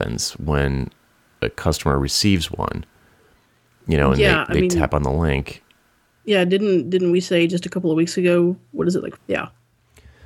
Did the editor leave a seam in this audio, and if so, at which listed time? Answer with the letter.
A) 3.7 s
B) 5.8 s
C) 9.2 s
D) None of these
C